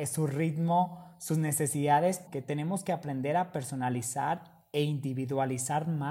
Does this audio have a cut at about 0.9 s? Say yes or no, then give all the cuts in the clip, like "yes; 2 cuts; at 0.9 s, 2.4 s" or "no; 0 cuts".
no; 1 cut; at 2.3 s